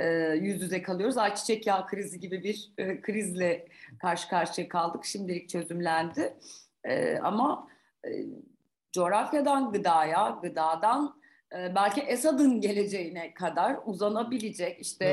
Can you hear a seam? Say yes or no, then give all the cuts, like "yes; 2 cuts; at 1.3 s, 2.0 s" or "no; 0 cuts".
no; 0 cuts